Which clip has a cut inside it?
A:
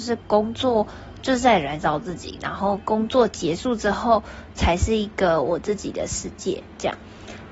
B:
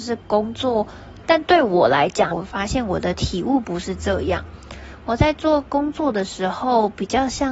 B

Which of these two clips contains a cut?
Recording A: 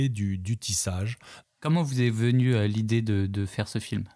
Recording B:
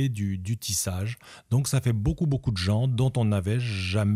A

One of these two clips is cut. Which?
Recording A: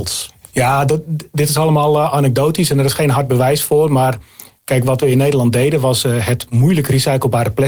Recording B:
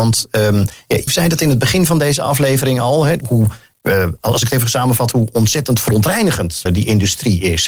B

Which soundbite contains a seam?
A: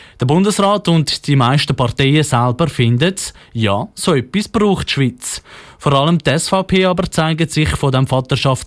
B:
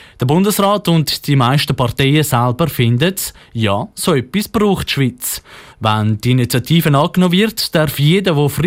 B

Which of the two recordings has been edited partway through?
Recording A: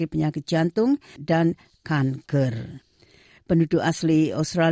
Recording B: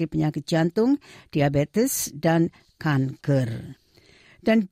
A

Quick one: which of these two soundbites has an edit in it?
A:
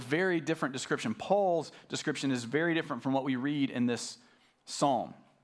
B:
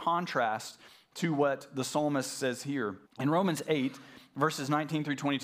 B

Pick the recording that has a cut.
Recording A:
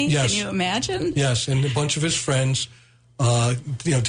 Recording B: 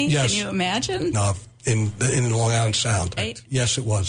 B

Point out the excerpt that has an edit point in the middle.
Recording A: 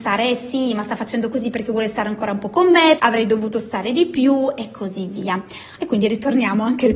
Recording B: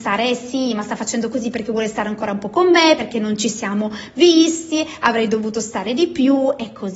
A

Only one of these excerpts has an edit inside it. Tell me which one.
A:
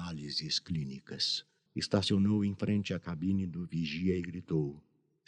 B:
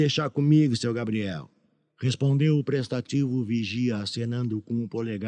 A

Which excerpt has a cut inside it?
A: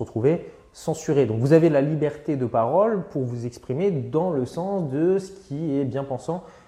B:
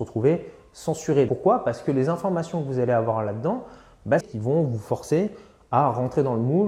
B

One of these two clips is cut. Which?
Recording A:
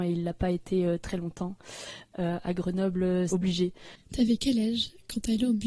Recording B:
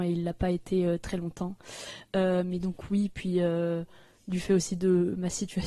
A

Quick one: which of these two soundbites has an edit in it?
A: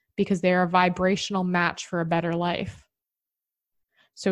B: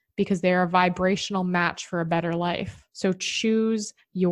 B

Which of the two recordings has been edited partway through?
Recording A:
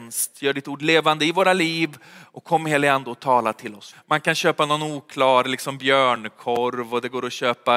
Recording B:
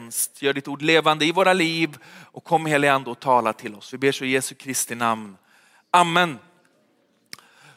A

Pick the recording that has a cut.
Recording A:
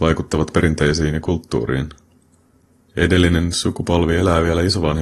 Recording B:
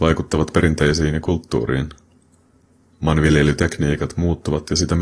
A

